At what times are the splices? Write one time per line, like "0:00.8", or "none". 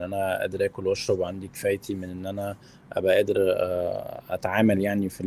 none